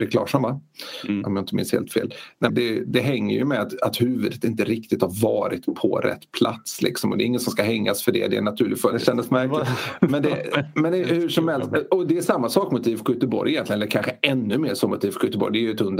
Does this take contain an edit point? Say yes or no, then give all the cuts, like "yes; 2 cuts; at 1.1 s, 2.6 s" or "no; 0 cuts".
yes; 2 cuts; at 2.5 s, 8.9 s